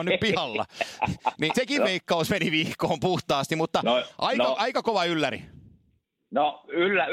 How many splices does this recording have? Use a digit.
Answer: 1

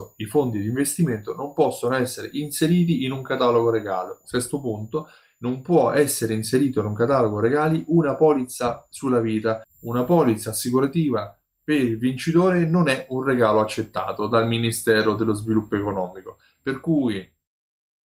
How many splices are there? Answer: 1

